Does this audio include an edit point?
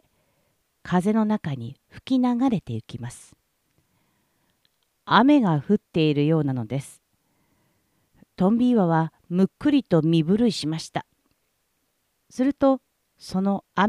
no; 0 cuts

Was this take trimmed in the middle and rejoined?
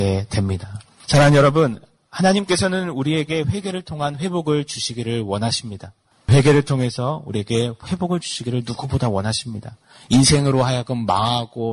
yes; 1 cut; at 1.0 s

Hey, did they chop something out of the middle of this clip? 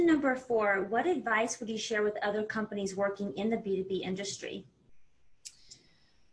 no; 0 cuts

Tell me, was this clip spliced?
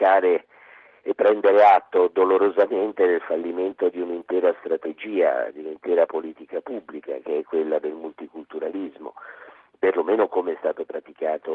no; 0 cuts

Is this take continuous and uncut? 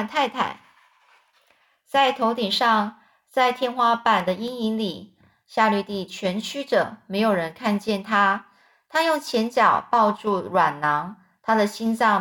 yes; 0 cuts

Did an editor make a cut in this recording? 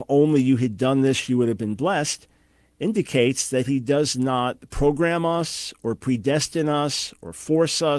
no; 0 cuts

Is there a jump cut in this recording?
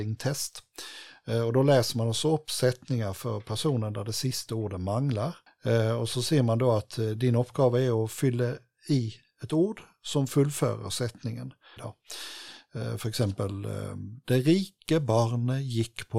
yes; 1 cut; at 11.8 s

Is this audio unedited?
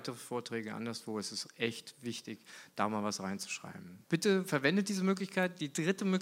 no; 1 cut; at 4.0 s

